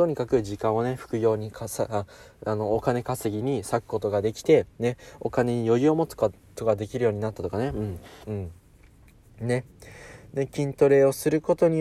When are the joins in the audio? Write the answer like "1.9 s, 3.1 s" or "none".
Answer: 8.2 s